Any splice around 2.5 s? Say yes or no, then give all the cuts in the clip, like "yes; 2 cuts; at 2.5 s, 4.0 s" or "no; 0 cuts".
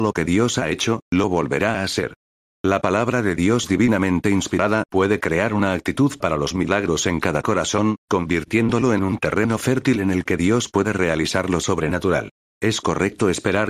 no; 1 cut; at 12.5 s